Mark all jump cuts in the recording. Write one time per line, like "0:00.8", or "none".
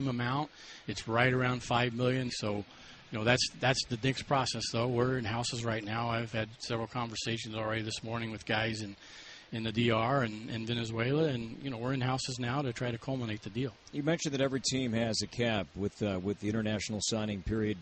0:02.3